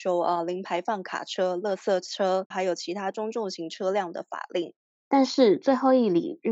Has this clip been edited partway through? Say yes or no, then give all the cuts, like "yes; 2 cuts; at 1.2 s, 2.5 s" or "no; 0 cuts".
yes; 2 cuts; at 2.5 s, 4.9 s